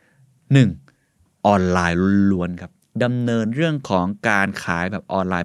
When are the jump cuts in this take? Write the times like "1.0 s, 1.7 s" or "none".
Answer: 1.4 s